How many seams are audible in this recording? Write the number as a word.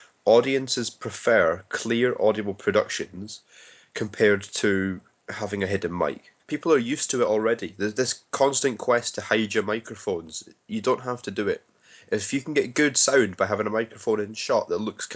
one